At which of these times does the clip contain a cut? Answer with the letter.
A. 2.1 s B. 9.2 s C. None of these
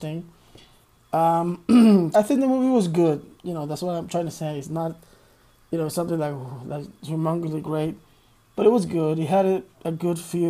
A